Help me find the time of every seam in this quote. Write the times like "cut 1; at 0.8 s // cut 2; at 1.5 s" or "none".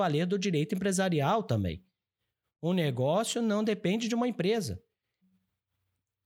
none